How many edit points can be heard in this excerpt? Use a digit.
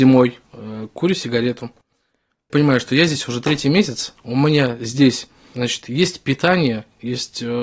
0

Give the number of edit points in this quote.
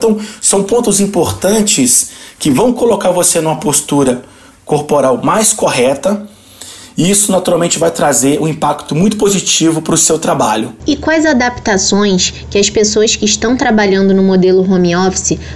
0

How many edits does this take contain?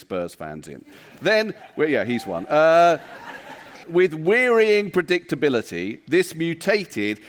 1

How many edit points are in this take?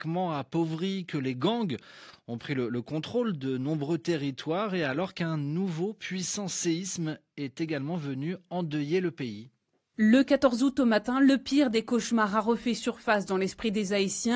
0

